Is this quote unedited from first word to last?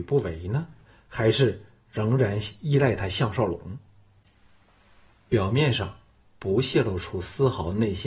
no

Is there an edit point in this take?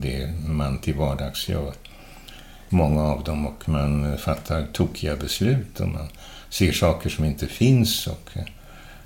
yes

